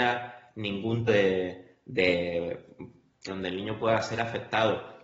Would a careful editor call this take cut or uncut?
cut